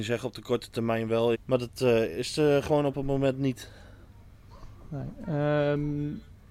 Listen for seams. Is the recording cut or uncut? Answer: cut